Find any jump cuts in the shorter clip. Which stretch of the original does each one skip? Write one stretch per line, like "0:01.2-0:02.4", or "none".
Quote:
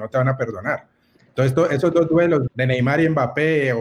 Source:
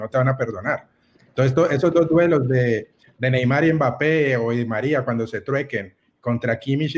0:02.5-0:03.1